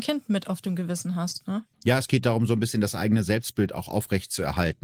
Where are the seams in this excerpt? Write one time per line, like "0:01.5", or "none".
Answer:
0:01.7